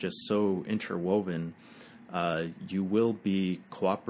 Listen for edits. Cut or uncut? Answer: uncut